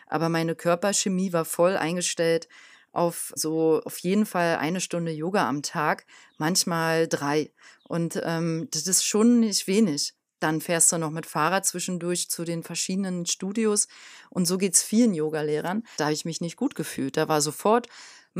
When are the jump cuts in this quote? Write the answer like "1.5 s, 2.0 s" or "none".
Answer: 3.4 s, 16.0 s